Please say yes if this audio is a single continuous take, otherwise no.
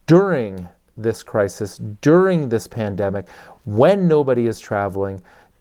yes